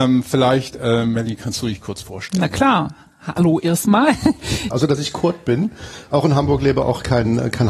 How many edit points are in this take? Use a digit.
1